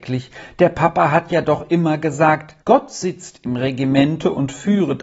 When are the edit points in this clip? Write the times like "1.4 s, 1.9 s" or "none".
2.6 s